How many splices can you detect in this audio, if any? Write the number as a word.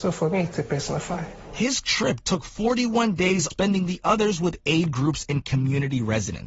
one